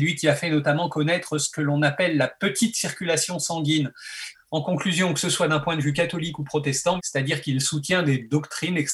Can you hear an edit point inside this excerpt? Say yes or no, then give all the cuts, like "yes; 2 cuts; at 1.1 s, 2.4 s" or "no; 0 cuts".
yes; 2 cuts; at 4.3 s, 7.0 s